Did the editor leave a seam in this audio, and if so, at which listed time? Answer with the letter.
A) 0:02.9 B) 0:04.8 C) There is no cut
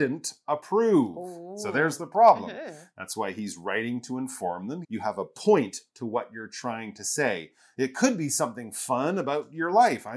B